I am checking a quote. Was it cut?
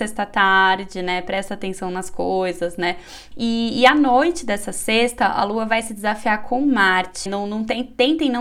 yes; 2 cuts; at 3.3 s, 7.3 s

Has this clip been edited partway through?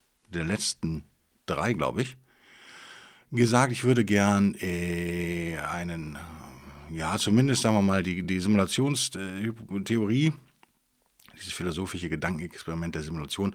no; 0 cuts

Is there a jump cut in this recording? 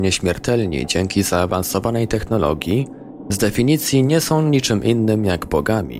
no; 0 cuts

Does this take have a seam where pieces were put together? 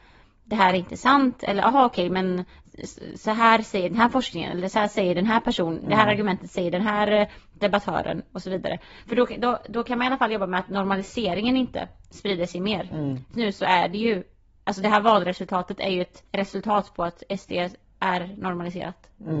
yes; 2 cuts; at 13.3 s, 16.3 s

